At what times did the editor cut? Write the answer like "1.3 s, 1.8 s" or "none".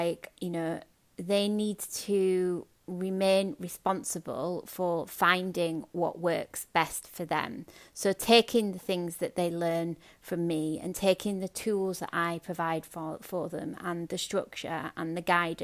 none